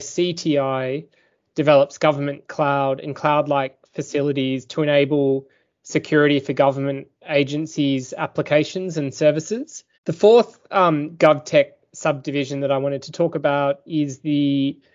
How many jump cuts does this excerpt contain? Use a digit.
1